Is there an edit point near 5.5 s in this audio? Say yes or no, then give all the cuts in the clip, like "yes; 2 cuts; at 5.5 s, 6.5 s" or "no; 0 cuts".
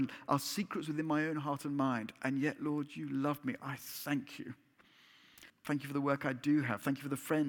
yes; 1 cut; at 5.5 s